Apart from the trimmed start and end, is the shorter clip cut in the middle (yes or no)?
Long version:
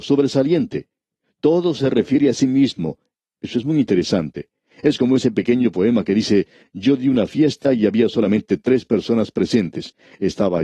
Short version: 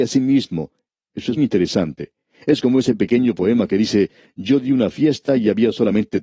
yes